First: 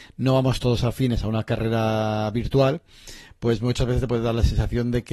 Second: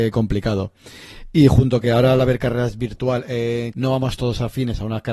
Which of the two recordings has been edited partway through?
second; 1 cut; at 3.7 s

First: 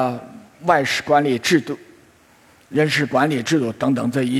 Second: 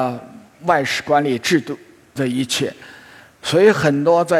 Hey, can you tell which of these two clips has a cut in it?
second; 1 cut; at 2.2 s

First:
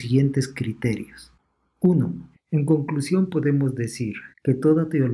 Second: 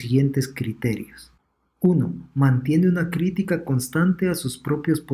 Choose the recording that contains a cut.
first; 1 cut; at 2.3 s

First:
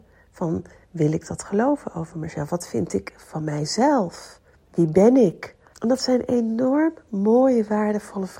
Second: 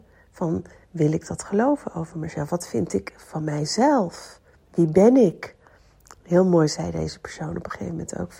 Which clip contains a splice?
first; 1 cut; at 5.7 s

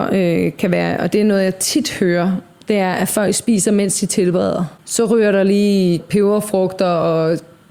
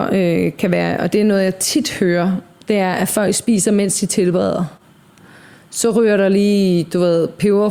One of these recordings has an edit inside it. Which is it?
first; 2 cuts; at 4.8 s, 6.0 s

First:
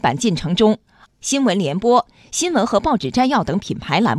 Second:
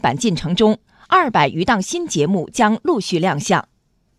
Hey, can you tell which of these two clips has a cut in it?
first; 1 cut; at 1.0 s

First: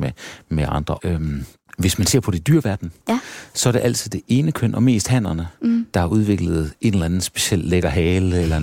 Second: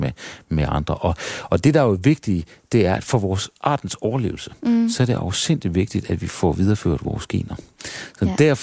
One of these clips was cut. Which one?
first; 1 cut; at 1.0 s

